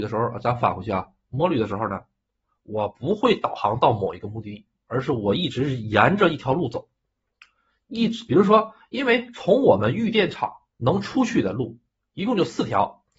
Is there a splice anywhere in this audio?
no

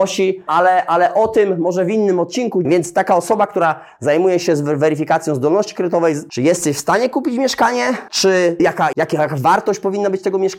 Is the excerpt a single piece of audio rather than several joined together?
no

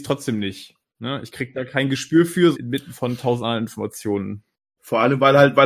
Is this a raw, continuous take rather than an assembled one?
no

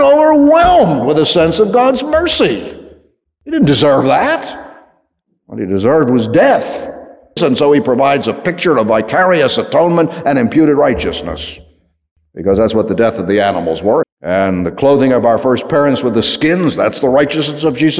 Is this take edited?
yes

